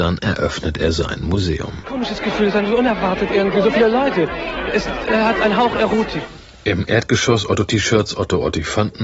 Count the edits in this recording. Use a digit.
0